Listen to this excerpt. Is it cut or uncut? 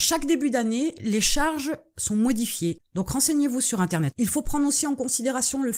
cut